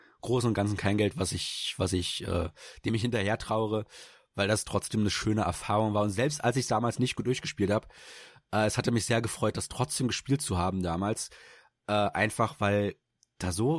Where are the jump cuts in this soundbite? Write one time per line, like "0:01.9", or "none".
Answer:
none